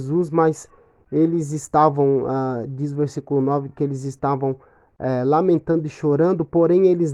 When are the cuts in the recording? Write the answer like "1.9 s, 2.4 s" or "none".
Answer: none